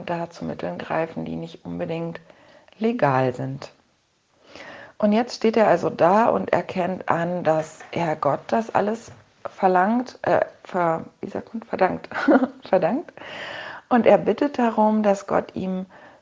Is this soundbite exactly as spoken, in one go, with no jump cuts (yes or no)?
yes